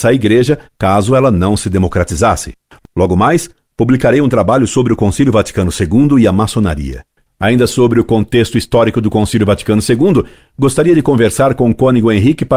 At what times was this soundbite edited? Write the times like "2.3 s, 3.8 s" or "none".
7.3 s